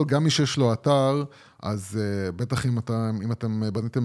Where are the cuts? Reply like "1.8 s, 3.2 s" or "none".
none